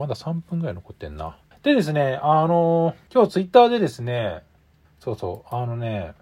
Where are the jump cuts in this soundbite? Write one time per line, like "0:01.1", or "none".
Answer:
0:01.5
0:03.1
0:04.8